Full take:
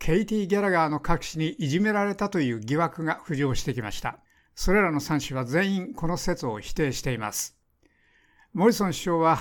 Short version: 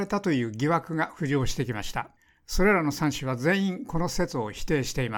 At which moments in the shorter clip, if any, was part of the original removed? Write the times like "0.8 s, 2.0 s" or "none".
none